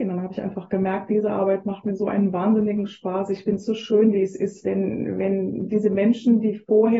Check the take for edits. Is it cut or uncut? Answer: cut